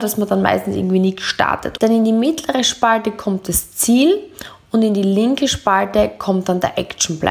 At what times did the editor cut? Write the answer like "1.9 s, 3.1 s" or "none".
1.7 s